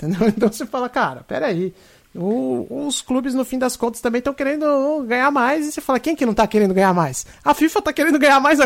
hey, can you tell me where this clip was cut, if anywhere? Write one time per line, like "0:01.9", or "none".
none